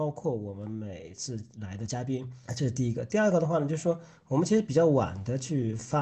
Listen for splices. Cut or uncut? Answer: cut